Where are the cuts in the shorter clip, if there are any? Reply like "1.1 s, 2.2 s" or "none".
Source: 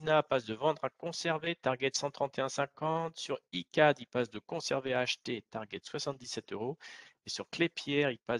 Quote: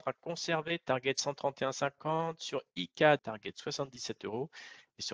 3.2 s